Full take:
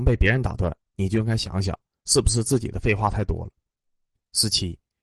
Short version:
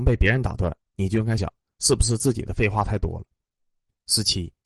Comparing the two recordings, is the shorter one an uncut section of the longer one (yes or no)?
no